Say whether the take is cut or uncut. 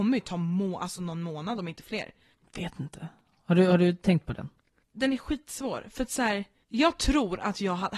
uncut